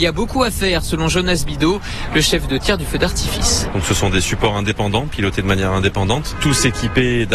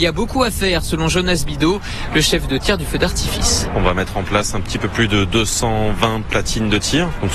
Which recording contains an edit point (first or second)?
first